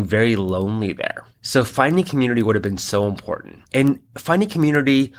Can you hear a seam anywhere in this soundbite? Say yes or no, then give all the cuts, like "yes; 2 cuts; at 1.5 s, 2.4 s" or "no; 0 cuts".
yes; 2 cuts; at 1.3 s, 3.7 s